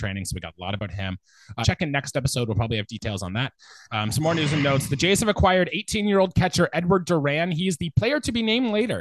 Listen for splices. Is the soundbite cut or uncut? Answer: cut